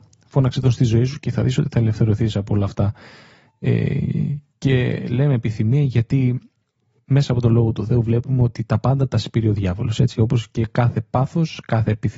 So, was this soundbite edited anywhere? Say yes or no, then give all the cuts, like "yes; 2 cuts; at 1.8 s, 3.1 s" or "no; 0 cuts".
no; 0 cuts